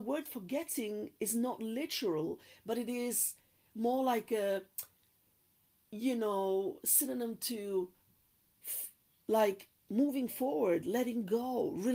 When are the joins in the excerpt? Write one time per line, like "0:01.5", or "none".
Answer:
none